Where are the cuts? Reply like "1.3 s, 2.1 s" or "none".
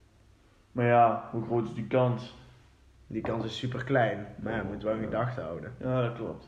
none